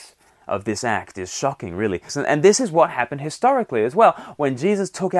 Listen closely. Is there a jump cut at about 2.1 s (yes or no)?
yes